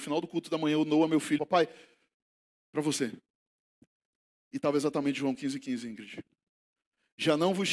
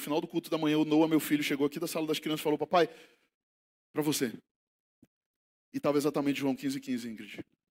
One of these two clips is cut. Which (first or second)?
first